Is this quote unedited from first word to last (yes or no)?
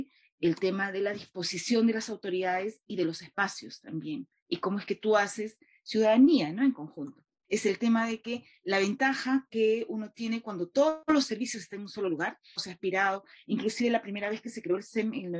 no